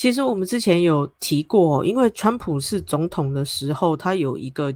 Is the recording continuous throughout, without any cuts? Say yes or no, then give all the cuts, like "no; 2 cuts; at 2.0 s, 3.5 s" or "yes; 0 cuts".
yes; 0 cuts